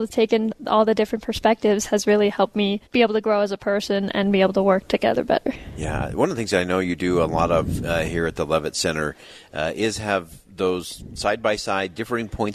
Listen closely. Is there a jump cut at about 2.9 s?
yes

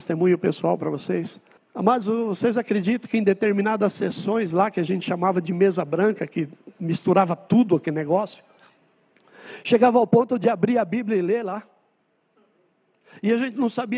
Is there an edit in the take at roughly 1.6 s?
yes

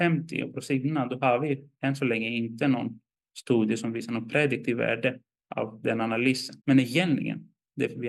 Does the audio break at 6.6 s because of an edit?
yes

